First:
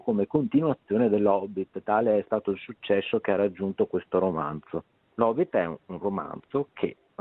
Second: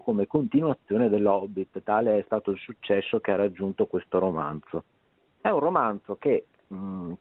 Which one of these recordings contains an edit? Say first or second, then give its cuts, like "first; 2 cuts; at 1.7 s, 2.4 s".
first; 1 cut; at 5.0 s